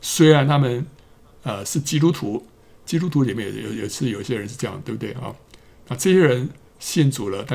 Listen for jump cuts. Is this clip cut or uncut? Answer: uncut